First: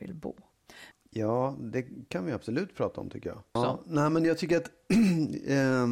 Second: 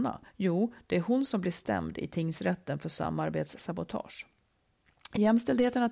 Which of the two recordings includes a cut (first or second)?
first